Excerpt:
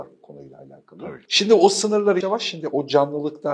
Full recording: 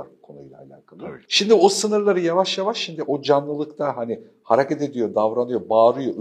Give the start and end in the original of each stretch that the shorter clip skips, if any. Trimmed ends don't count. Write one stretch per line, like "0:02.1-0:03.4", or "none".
0:02.2-0:02.6